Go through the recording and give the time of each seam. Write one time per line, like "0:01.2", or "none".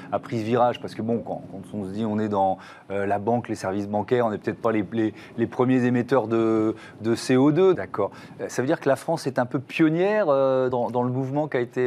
0:07.7
0:10.7